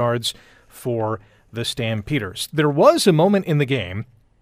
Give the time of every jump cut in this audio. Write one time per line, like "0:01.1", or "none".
none